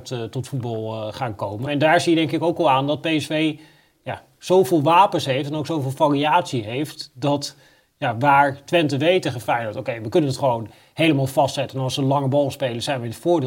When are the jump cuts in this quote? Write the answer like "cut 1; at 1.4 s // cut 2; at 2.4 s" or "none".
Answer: cut 1; at 1.7 s